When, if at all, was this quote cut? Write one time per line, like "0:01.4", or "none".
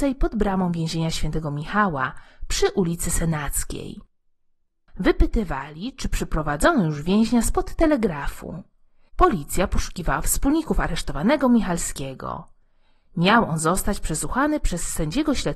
0:09.1
0:13.0